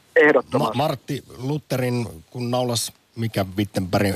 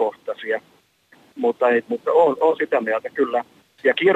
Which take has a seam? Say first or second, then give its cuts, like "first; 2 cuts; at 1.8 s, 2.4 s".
second; 1 cut; at 1.9 s